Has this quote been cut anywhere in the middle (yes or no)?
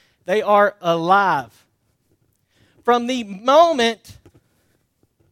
no